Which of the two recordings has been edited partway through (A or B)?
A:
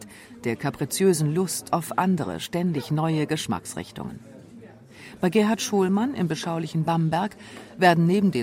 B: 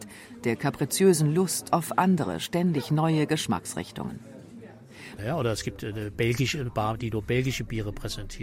B